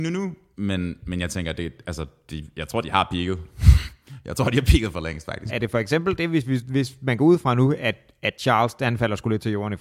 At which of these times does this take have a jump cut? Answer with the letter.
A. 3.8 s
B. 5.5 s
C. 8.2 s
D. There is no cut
B